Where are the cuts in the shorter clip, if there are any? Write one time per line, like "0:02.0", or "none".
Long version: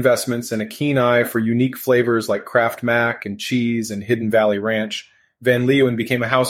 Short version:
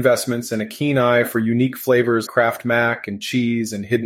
0:02.3